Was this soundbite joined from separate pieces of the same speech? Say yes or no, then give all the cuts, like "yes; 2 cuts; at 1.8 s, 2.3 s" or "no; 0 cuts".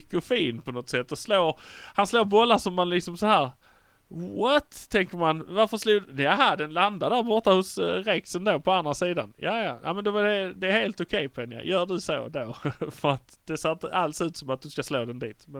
no; 0 cuts